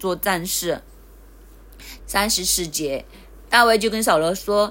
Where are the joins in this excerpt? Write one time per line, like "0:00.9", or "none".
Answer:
0:02.0